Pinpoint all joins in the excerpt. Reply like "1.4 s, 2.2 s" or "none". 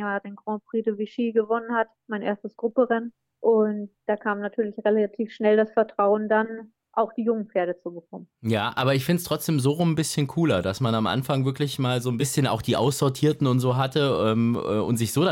none